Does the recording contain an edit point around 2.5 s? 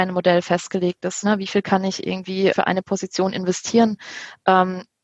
yes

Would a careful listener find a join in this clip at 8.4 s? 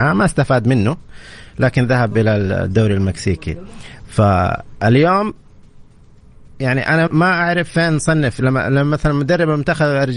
no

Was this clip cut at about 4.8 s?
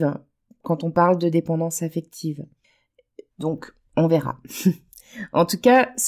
no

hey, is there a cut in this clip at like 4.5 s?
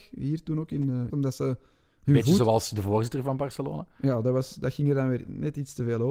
no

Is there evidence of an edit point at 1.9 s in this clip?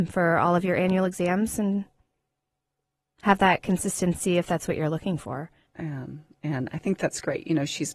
no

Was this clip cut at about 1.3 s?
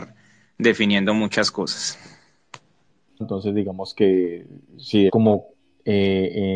no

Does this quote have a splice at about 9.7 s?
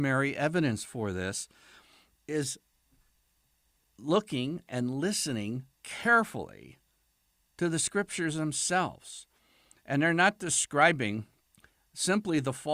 no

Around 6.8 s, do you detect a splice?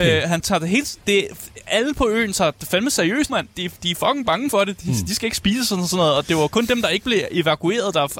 no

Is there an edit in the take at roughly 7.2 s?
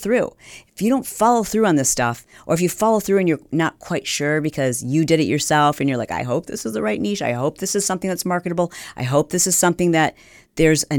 no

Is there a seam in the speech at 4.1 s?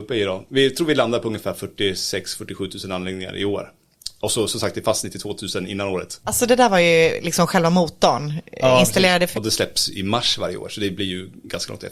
no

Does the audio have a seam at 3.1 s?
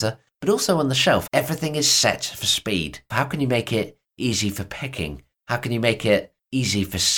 yes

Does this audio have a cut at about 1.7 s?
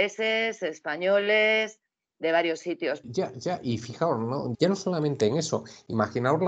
no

